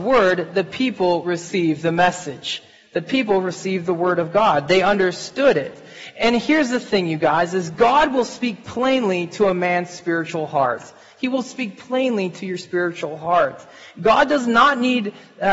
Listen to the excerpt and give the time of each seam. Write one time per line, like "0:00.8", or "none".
none